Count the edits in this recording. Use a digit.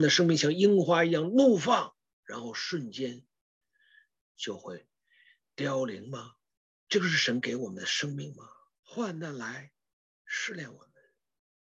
1